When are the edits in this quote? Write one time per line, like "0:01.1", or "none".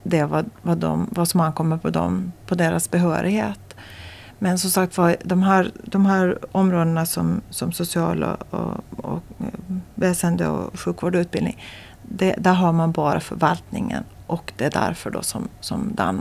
none